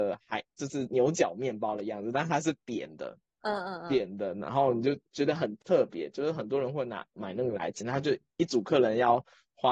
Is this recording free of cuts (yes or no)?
no